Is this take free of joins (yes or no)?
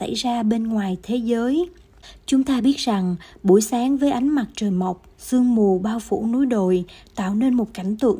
no